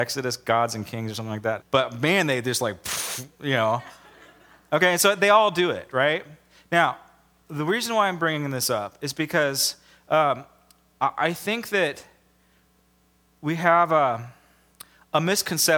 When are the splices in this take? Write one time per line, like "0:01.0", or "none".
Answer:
0:01.6